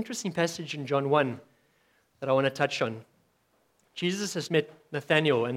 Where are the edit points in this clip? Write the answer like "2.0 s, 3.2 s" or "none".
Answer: 4.5 s

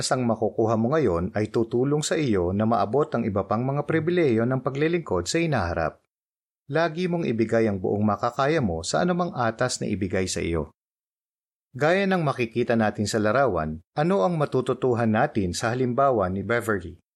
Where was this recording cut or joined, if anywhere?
11.6 s, 13.9 s

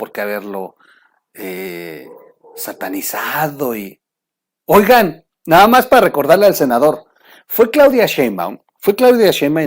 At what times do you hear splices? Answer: none

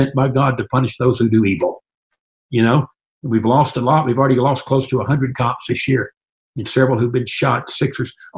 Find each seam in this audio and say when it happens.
none

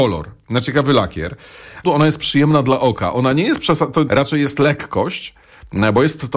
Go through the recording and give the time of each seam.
1.8 s, 4.1 s

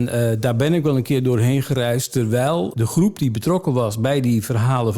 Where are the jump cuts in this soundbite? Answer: 2.7 s

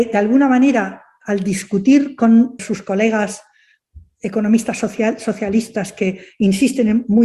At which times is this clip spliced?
2.6 s

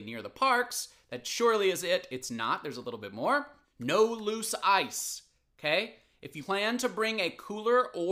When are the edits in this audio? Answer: none

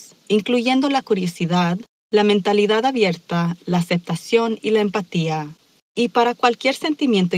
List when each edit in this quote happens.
5.8 s

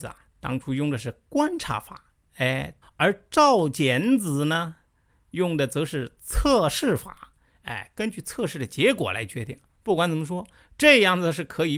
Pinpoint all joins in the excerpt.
2.8 s

